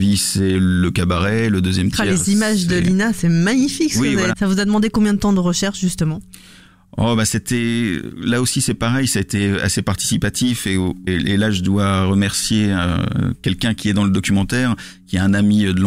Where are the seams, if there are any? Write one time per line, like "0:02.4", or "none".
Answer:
0:04.3
0:11.1